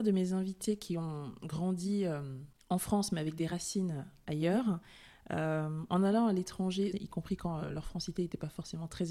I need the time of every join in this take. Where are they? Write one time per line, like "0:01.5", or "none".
0:06.9